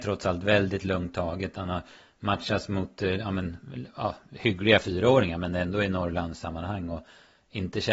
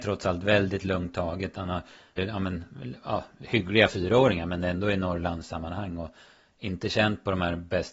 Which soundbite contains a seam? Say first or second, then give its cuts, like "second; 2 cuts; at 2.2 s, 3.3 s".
second; 1 cut; at 2.2 s